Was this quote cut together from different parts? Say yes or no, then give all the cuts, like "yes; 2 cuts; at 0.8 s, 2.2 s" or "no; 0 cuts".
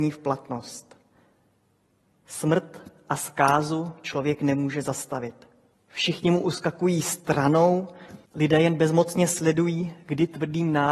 yes; 2 cuts; at 5.7 s, 8.3 s